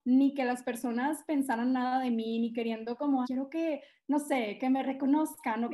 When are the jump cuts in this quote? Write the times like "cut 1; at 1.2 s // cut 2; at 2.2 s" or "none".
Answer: cut 1; at 3.2 s